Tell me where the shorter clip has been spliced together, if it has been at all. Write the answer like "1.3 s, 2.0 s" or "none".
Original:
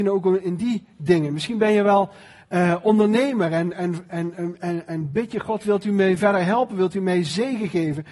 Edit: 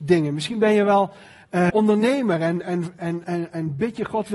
1.7 s, 3.2 s